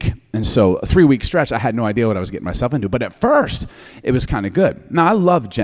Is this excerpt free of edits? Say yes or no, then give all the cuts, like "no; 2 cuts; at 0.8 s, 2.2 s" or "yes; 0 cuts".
yes; 0 cuts